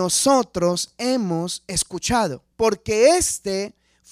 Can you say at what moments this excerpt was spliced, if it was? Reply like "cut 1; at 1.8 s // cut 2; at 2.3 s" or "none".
cut 1; at 2.5 s